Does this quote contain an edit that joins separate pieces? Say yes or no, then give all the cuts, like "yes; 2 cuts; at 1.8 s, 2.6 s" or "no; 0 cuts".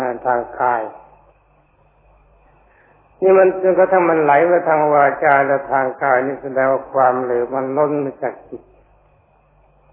no; 0 cuts